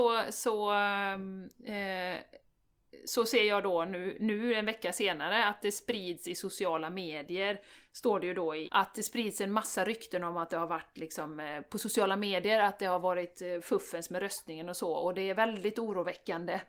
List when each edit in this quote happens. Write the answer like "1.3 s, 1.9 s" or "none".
8.7 s